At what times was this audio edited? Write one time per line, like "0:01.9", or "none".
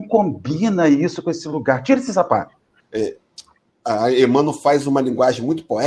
0:02.8

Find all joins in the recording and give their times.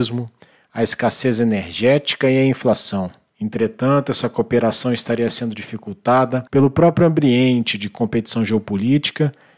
0:03.3
0:06.5

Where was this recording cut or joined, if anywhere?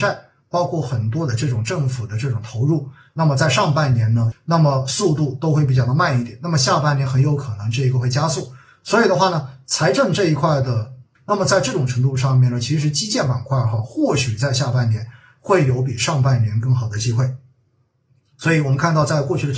0:04.3
0:11.2

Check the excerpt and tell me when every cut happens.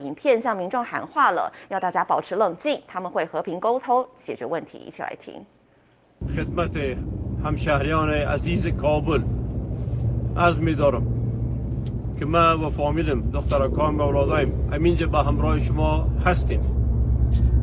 none

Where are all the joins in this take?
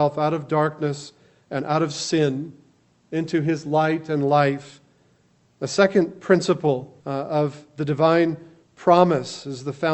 0:05.4
0:07.0

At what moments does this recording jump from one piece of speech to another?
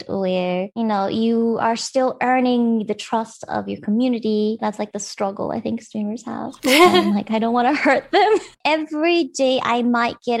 0:04.6
0:06.6
0:08.5

